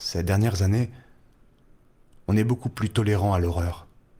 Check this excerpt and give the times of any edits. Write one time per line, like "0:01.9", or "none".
none

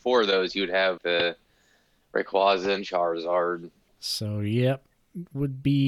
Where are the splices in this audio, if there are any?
0:01.0
0:03.9

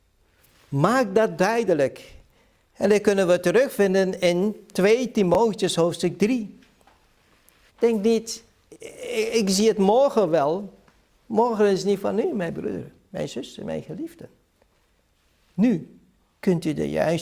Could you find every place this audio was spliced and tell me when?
0:07.7

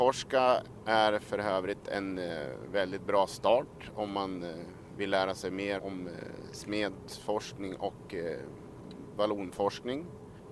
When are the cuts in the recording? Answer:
0:05.8

